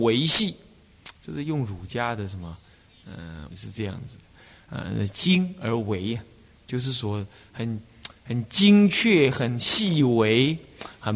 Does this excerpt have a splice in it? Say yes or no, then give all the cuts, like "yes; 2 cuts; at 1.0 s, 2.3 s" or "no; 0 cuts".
yes; 1 cut; at 3.5 s